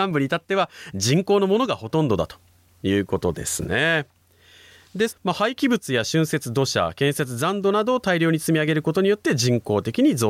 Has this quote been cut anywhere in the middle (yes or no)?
yes